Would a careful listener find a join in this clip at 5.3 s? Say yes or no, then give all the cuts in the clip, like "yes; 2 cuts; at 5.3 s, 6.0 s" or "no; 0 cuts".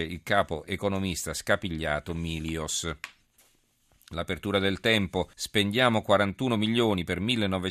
yes; 1 cut; at 5.3 s